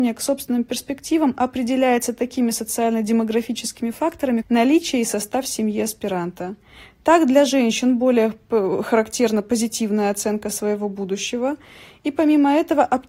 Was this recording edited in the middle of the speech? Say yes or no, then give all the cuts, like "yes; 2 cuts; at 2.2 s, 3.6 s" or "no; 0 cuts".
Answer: yes; 1 cut; at 4.4 s